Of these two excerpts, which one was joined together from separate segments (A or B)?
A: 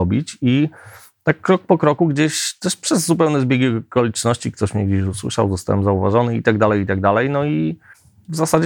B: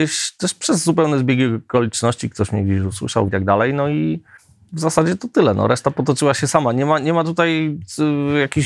B